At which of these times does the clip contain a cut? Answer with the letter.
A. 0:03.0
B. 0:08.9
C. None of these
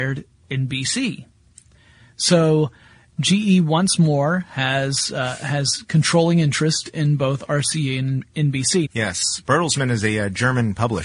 B